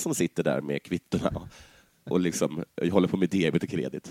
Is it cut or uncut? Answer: cut